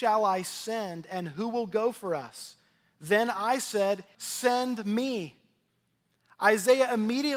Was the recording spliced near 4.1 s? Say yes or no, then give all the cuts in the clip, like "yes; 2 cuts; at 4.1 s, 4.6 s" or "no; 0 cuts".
yes; 1 cut; at 4.1 s